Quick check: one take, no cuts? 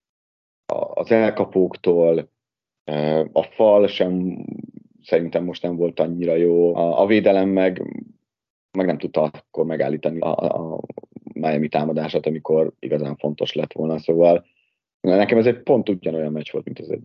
no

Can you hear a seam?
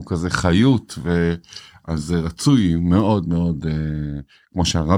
no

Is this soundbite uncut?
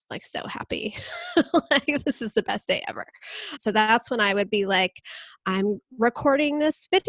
no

